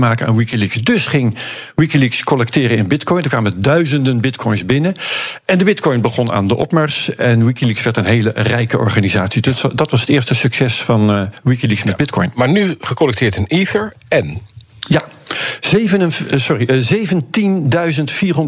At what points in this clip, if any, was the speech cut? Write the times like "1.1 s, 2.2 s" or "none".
none